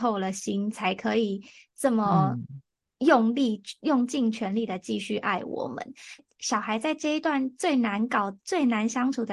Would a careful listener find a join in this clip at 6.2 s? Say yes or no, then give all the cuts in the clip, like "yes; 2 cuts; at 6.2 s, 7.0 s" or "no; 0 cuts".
yes; 1 cut; at 6.2 s